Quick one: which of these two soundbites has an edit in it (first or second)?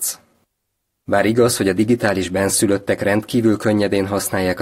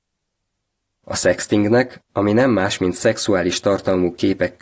first